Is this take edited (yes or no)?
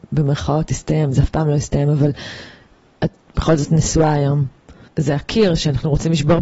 yes